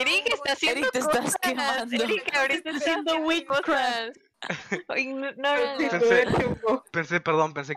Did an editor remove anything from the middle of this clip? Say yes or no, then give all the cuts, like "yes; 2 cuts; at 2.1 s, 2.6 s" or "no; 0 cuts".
no; 0 cuts